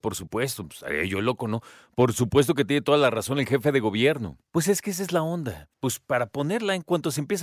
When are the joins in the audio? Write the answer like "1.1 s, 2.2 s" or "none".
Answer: 4.5 s, 5.7 s